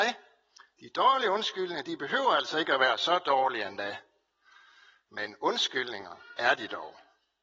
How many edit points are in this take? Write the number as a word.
zero